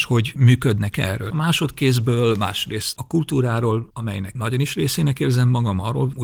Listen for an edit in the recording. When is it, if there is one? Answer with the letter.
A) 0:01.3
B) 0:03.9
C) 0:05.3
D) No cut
A